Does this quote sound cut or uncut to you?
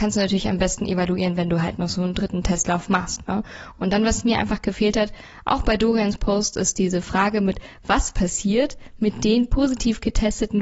uncut